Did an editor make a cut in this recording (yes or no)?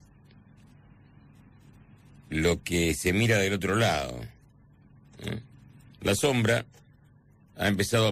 yes